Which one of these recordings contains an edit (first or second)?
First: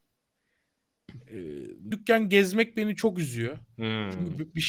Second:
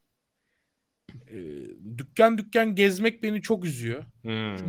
first